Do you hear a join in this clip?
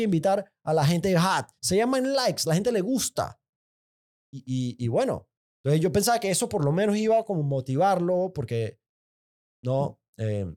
yes; 1 cut; at 1.6 s

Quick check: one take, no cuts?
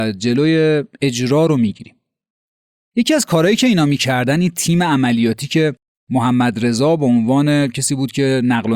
yes; 0 cuts

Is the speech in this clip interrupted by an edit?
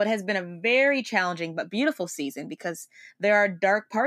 no; 0 cuts

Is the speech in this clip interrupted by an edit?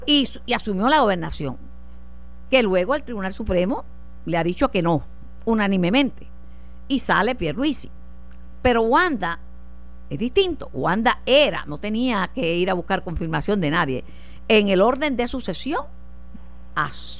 no; 0 cuts

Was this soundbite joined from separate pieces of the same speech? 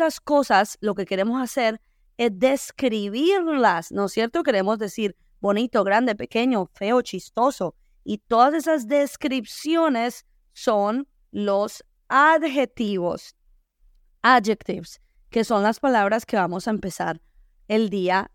no; 0 cuts

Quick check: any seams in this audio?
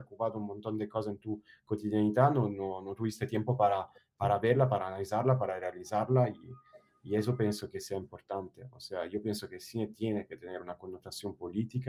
no; 0 cuts

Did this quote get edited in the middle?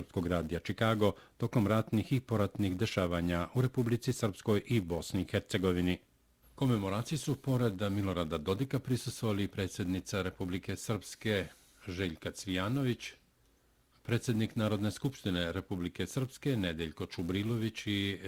yes; 1 cut; at 6.4 s

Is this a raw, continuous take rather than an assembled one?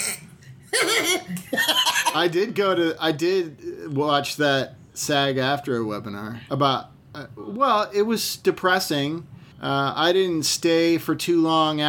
no; 2 cuts; at 6.5 s, 9.5 s

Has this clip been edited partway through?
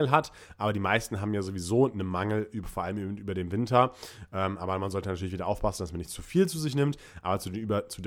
no; 0 cuts

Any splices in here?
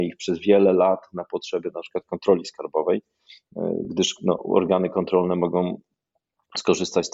no; 0 cuts

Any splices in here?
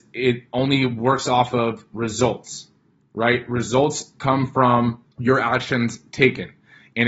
yes; 1 cut; at 5.1 s

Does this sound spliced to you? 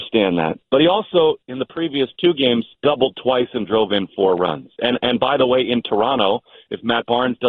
yes; 1 cut; at 2.7 s

